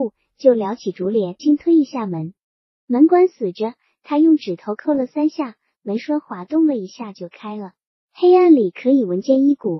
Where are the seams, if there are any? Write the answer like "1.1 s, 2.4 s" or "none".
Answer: 1.4 s

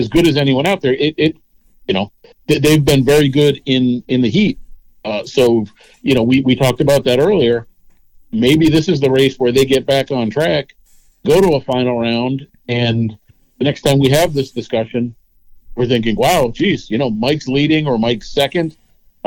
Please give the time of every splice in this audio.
none

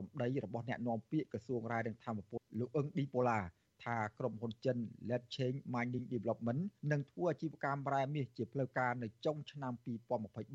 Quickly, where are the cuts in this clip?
2.4 s, 6.8 s

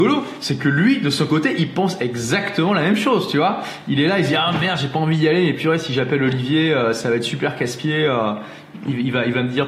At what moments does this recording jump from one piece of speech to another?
none

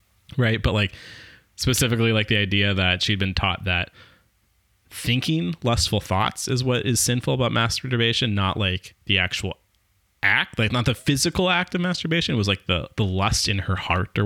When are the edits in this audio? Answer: none

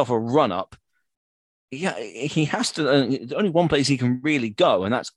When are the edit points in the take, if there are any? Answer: none

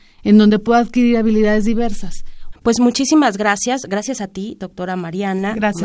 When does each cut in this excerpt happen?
2.5 s

